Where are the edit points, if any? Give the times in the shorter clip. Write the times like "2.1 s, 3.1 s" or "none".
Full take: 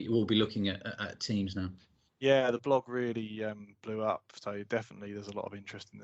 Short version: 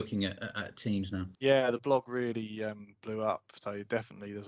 1.4 s